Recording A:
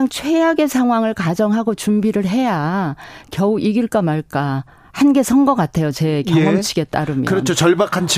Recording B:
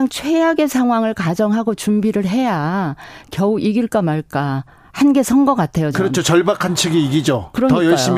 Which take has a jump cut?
B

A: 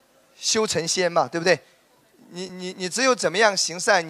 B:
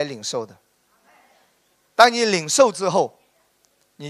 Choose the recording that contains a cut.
A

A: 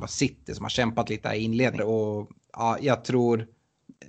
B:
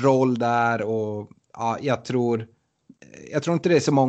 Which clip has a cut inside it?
A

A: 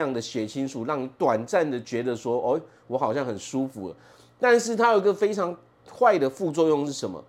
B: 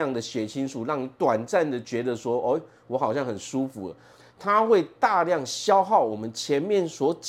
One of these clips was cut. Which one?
B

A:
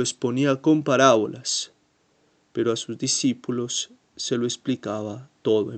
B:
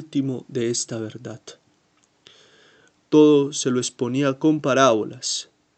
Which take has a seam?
B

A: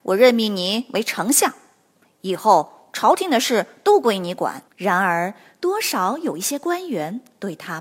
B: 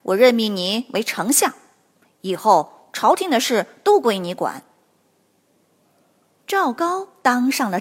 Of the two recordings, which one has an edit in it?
A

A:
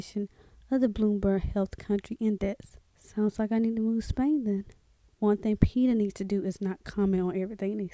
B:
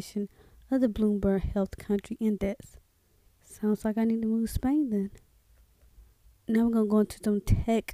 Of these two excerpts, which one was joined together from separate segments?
A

